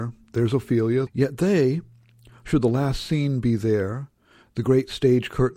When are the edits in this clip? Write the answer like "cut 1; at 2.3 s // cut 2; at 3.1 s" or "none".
cut 1; at 1.1 s